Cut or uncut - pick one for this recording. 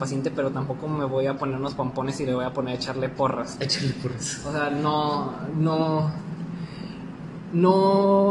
uncut